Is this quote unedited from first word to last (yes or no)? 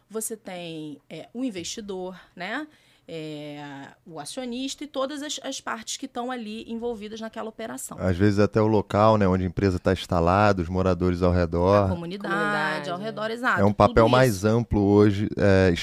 yes